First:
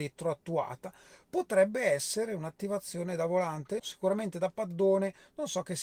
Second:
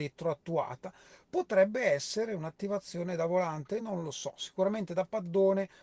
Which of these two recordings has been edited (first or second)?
first